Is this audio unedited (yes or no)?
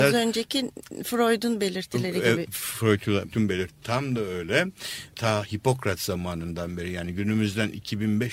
no